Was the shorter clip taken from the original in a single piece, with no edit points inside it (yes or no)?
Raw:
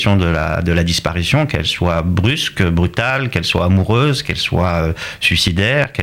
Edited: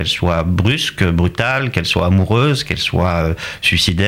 yes